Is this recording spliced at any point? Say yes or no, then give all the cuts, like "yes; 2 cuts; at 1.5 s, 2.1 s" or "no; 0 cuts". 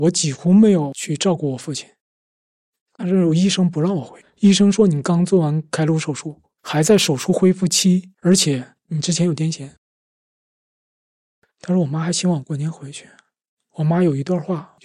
yes; 1 cut; at 4.2 s